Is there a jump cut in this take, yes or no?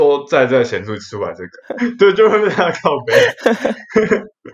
yes